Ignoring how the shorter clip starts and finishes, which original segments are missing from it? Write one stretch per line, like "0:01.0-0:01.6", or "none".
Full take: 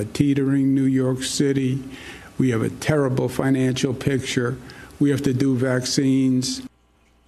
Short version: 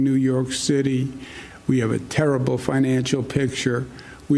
none